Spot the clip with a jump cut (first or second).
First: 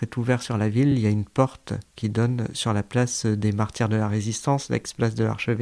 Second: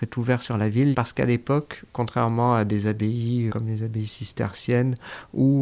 second